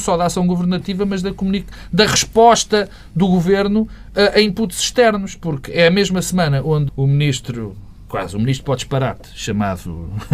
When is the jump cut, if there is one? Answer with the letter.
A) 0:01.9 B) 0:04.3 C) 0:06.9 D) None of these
C